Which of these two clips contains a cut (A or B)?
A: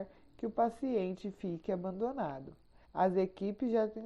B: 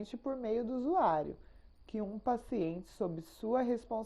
A